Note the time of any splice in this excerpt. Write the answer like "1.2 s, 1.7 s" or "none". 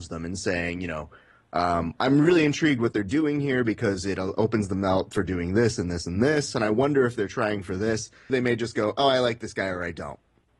8.3 s